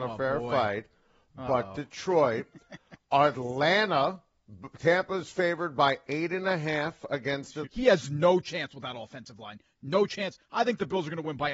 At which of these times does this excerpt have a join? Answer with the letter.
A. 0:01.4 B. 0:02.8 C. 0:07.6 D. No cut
C